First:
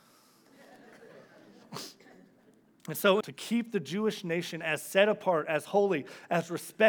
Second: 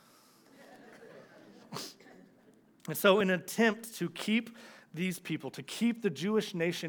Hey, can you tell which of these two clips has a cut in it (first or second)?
first